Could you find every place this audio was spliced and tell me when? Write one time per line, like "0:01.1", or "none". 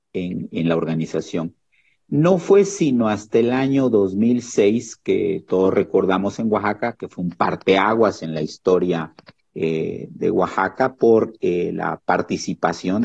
none